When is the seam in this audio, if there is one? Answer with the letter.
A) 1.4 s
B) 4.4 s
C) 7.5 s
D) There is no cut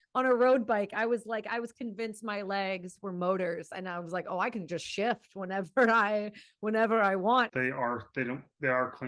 C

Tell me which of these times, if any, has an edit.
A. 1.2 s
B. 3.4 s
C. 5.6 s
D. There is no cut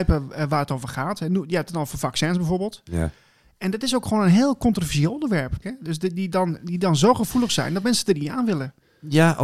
C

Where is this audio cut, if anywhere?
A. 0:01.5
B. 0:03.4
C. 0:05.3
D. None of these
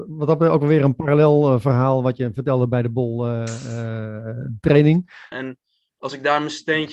C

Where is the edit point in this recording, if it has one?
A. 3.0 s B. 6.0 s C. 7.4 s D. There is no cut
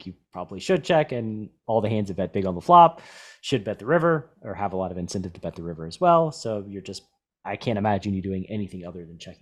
C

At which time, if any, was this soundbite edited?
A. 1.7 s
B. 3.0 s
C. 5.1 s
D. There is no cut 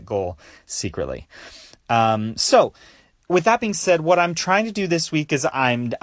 D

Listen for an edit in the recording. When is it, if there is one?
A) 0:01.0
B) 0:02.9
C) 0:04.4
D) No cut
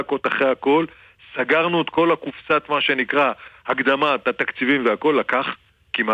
D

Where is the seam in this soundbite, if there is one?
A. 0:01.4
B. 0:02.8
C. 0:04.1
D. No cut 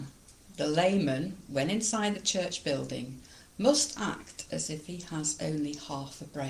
D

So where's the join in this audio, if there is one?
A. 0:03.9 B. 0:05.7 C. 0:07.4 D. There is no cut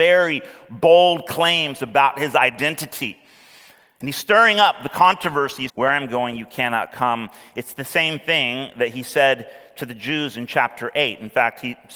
B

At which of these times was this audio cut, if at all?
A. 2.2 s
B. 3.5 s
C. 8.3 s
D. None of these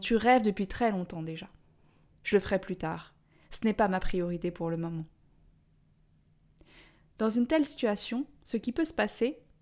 A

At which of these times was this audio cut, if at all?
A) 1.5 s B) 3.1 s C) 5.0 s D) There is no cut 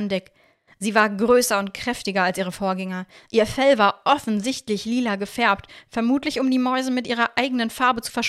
D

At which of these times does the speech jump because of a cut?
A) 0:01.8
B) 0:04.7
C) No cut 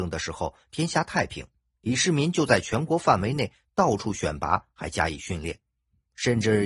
A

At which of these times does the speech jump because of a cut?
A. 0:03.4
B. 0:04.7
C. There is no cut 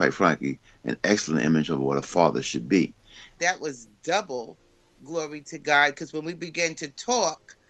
A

